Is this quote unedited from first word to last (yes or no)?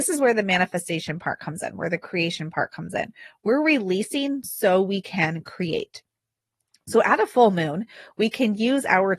yes